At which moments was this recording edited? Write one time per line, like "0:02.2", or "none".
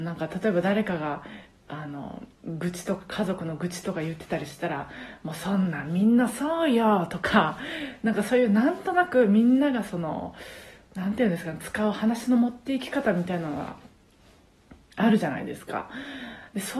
0:02.3